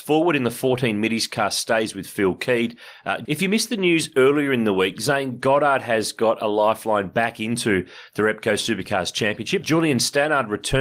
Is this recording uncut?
no; 2 cuts; at 3.3 s, 9.6 s

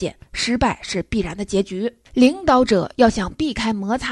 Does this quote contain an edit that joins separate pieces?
yes; 1 cut; at 2.1 s

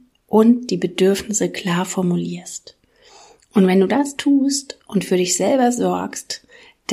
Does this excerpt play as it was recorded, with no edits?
yes; 0 cuts

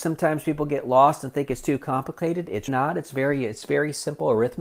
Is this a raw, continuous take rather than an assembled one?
no; 1 cut; at 2.7 s

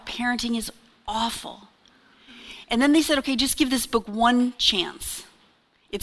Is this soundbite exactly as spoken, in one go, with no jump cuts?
yes; 0 cuts

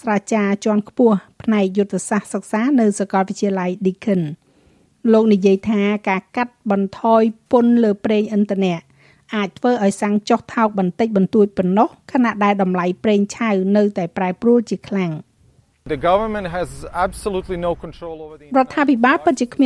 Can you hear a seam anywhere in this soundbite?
no; 0 cuts

